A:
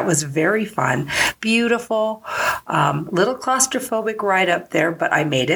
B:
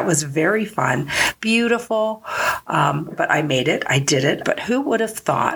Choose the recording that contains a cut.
B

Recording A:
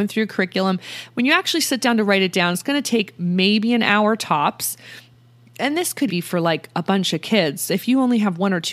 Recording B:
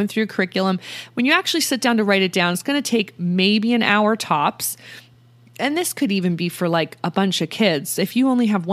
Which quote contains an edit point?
A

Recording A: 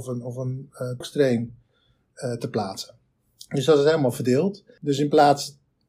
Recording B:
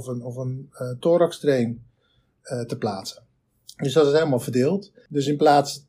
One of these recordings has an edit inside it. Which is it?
A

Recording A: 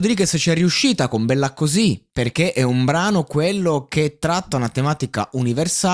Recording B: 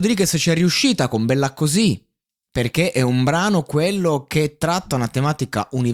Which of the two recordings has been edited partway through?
A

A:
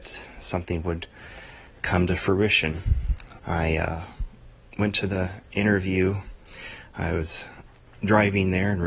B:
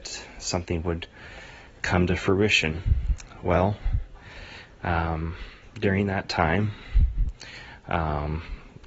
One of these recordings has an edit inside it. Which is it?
A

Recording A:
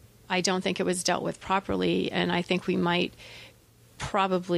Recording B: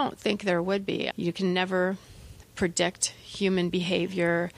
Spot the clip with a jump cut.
B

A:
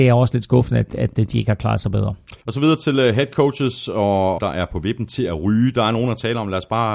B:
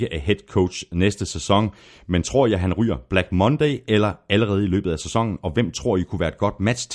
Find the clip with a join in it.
A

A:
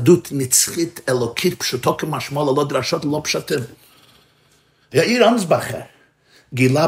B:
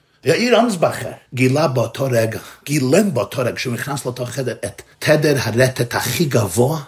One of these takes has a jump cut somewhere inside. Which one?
B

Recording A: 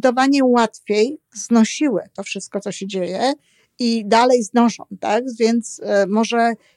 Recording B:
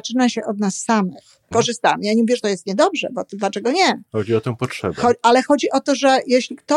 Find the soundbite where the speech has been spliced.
B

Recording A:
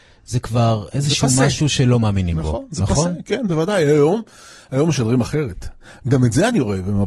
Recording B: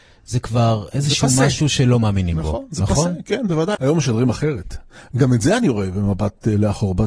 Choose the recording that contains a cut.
B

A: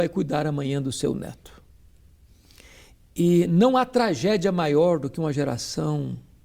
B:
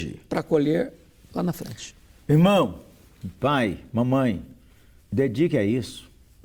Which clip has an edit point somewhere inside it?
B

